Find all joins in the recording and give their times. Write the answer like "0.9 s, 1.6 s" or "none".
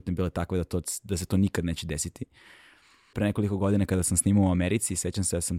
3.1 s